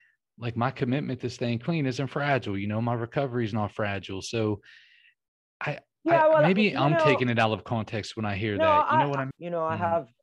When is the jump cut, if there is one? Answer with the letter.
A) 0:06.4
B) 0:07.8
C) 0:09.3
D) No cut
C